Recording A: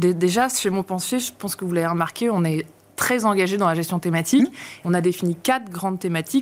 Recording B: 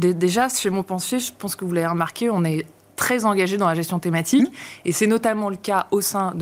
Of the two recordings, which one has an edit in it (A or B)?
A